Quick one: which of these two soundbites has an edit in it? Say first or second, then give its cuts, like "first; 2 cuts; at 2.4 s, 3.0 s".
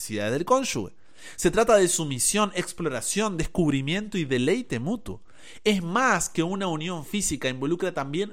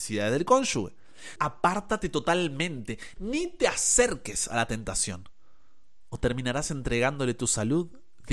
second; 1 cut; at 1.4 s